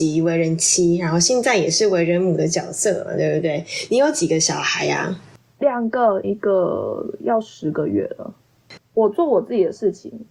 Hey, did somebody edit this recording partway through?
yes; 2 cuts; at 6.2 s, 8.8 s

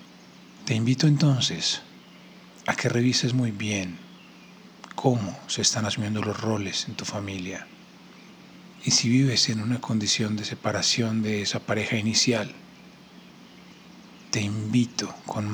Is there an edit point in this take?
no; 0 cuts

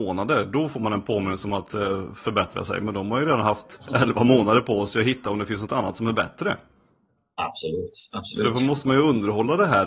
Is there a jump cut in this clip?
no; 0 cuts

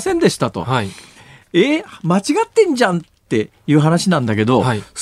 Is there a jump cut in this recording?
no; 0 cuts

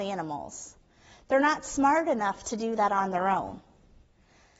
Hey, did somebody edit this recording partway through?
no; 0 cuts

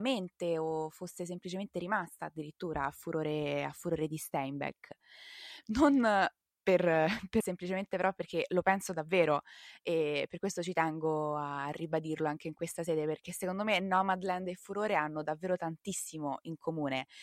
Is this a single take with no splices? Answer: no; 2 cuts; at 5.6 s, 7.4 s

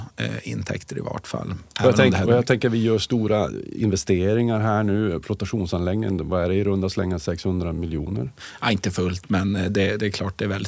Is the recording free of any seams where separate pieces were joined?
yes; 0 cuts

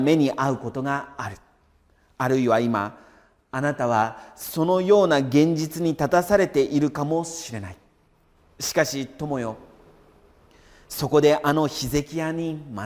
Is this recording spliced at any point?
no; 0 cuts

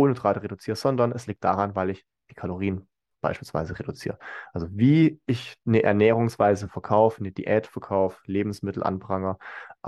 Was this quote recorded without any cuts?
yes; 0 cuts

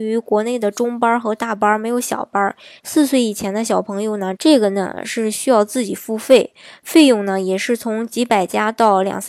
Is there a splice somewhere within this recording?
yes; 2 cuts; at 2.8 s, 4.4 s

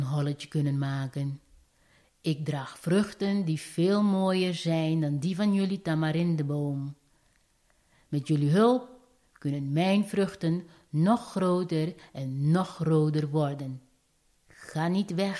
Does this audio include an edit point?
no; 0 cuts

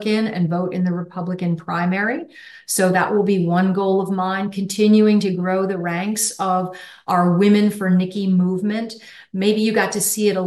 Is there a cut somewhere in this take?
no; 0 cuts

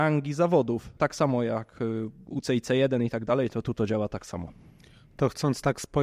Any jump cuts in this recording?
yes; 1 cut; at 1.0 s

